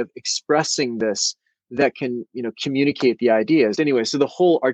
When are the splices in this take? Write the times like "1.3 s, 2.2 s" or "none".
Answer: 3.7 s